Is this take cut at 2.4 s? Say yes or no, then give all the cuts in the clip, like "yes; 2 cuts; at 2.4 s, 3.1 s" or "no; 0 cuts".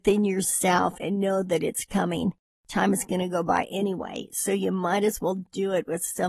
yes; 1 cut; at 2.4 s